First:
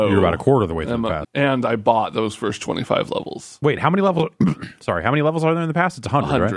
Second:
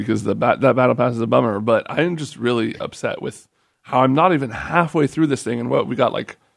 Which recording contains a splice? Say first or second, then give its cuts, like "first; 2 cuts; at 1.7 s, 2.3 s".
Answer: first; 1 cut; at 1.2 s